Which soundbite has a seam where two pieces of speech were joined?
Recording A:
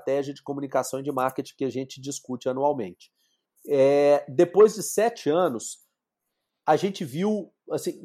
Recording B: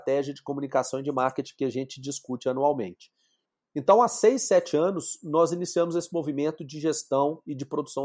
A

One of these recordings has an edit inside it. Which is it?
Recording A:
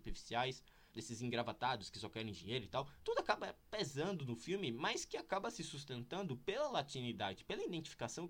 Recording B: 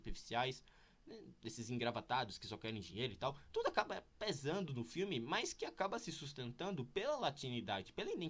A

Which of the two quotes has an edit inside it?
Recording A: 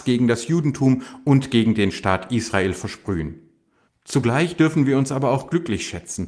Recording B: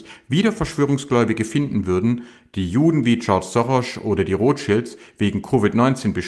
A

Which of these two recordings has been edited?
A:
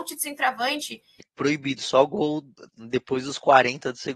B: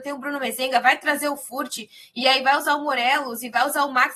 A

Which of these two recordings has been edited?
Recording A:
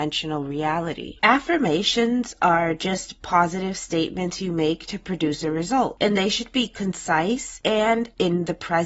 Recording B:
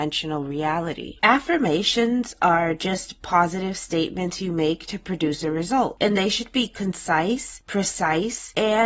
A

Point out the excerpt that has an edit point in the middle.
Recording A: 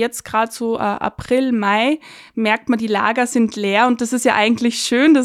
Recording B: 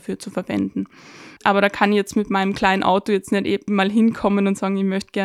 B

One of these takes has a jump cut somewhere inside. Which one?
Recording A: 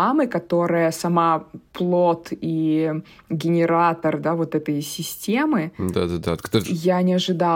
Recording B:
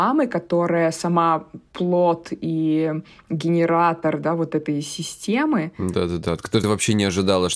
A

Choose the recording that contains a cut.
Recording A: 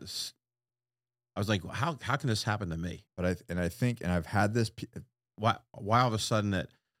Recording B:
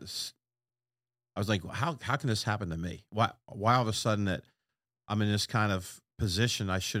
A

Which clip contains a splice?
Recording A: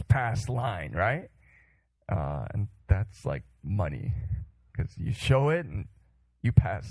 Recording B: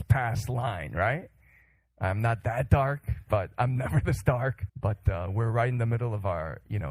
B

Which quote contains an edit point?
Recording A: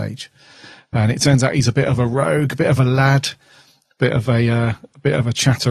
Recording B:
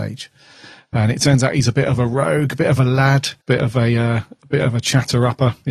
B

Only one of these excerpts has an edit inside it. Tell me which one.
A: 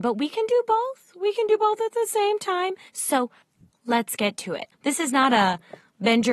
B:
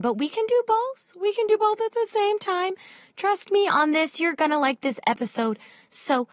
A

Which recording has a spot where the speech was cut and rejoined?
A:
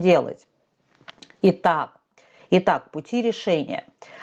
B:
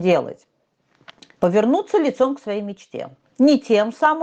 B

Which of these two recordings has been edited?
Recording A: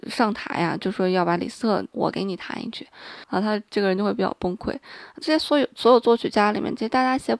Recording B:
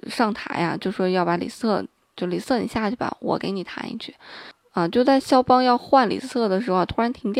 A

